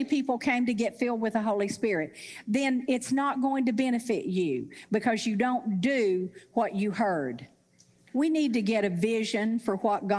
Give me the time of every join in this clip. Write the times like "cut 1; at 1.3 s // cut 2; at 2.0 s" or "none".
cut 1; at 8.1 s